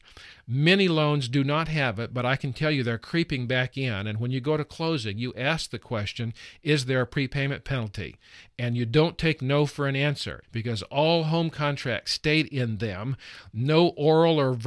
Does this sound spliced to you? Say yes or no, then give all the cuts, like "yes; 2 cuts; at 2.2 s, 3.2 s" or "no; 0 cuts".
yes; 1 cut; at 10.4 s